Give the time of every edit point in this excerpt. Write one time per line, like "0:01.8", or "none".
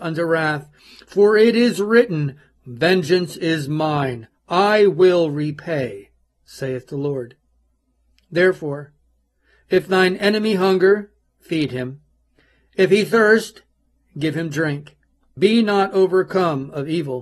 0:15.4